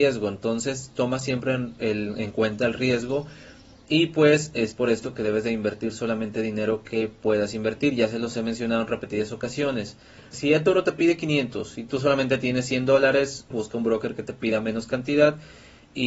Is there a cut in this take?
yes; 2 cuts; at 10.3 s, 13.5 s

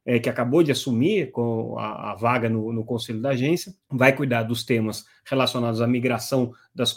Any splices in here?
yes; 1 cut; at 3.8 s

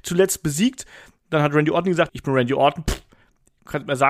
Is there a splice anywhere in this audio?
yes; 1 cut; at 2.1 s

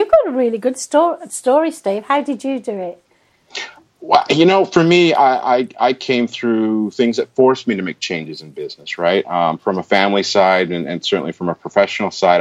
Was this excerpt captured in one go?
yes; 0 cuts

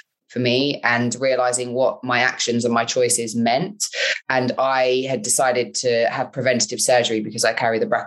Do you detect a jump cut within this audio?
yes; 1 cut; at 4.2 s

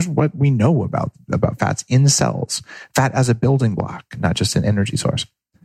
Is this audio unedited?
yes; 0 cuts

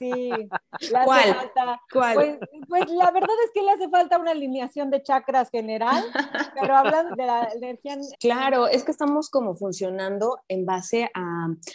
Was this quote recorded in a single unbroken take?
no; 2 cuts; at 7.1 s, 8.1 s

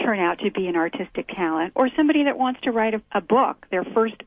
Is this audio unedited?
yes; 0 cuts

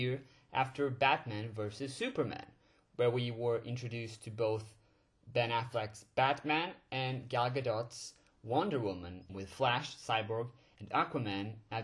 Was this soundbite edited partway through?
yes; 1 cut; at 9.3 s

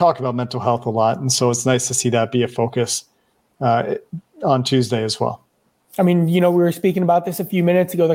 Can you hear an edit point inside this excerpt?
no; 0 cuts

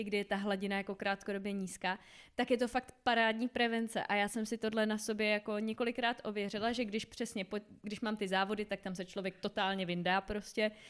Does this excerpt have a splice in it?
no; 0 cuts

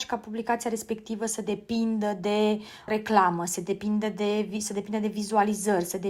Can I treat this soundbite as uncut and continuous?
no; 1 cut; at 2.9 s

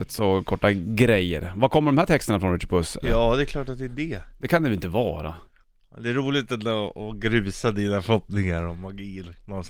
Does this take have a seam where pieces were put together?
yes; 1 cut; at 3.0 s

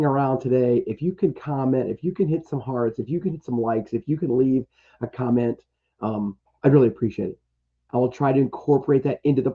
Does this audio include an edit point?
yes; 1 cut; at 7.9 s

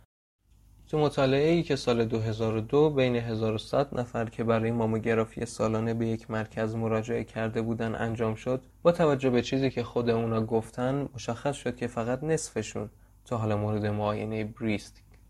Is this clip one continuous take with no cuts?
no; 1 cut; at 8.7 s

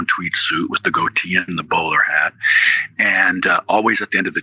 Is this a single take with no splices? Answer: yes; 0 cuts

